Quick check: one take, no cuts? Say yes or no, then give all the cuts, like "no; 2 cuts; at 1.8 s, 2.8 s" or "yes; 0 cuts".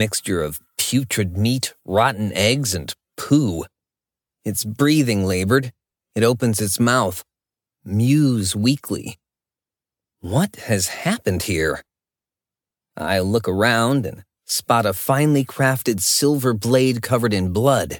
yes; 0 cuts